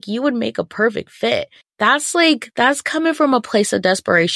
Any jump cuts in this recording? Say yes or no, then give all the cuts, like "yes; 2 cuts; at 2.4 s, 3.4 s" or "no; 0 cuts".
yes; 1 cut; at 1.6 s